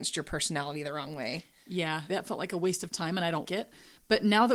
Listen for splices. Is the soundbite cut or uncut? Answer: cut